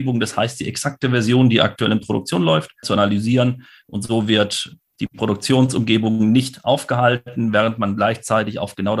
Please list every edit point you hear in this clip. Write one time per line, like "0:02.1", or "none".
0:02.8

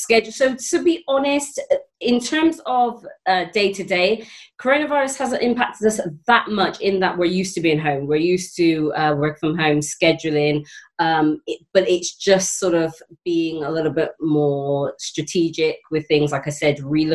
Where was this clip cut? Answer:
none

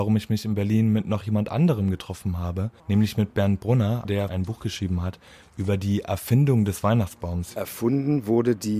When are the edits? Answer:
0:02.8
0:04.0

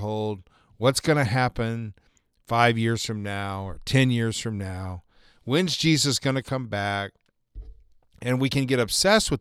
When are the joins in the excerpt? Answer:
none

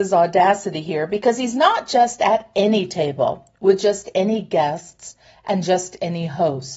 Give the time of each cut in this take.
none

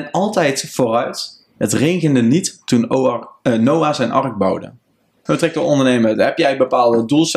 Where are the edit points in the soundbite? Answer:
0:05.3

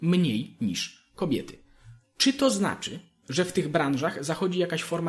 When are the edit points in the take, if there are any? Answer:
none

